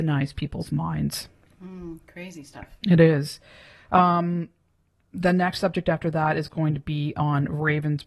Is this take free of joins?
yes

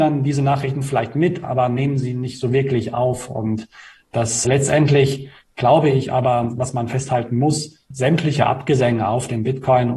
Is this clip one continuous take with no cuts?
yes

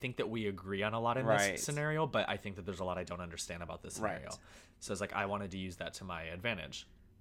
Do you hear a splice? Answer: no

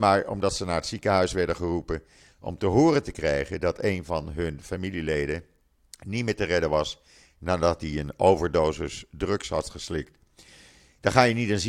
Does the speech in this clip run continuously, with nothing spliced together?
yes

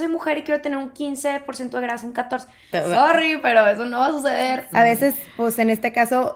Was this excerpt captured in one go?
no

